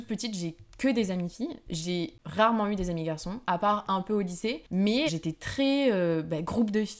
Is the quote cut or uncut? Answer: cut